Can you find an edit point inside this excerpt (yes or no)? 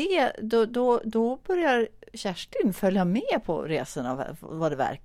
no